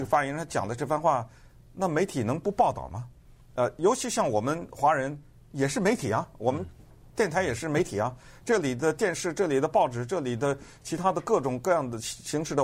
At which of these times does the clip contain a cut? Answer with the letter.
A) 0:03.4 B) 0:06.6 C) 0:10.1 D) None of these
D